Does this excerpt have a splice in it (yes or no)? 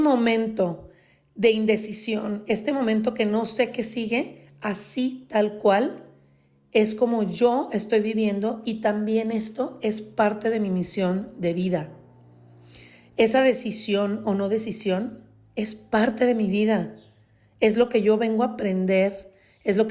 no